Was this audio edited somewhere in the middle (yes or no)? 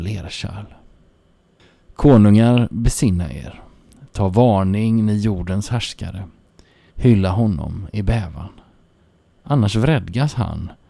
yes